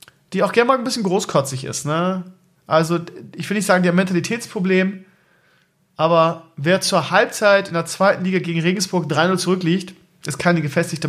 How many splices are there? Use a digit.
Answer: 0